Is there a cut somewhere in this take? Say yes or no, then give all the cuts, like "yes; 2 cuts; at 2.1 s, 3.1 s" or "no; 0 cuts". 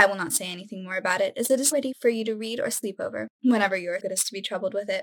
yes; 2 cuts; at 1.7 s, 4.0 s